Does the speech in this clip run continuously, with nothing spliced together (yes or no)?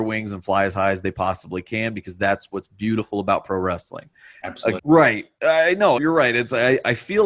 no